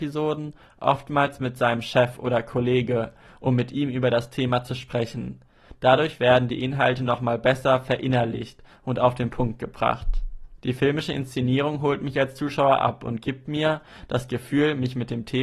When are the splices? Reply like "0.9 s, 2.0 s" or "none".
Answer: 10.6 s